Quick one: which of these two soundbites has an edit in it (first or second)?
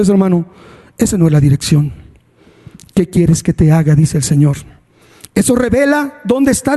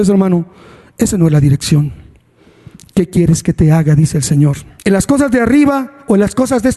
second